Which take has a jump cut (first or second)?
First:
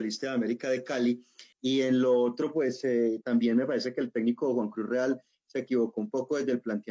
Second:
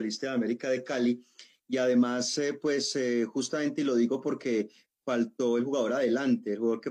first